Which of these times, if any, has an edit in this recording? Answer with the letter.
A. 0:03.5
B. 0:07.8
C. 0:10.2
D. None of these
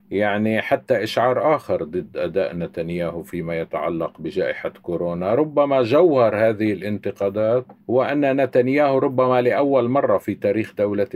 B